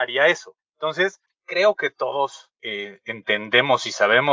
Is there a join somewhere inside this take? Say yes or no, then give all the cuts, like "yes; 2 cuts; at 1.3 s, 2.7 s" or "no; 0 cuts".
yes; 2 cuts; at 1.3 s, 2.6 s